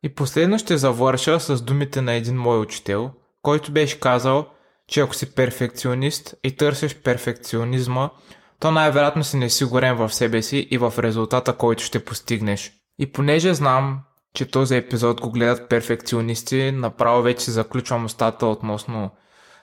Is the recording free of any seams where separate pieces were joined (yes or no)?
yes